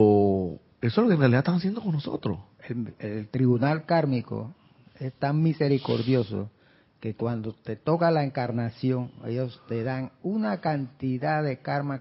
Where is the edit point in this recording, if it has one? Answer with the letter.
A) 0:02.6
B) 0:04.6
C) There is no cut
A